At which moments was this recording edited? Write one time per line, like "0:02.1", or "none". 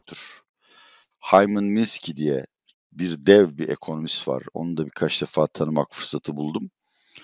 none